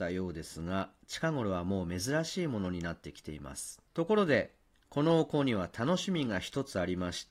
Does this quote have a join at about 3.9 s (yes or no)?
yes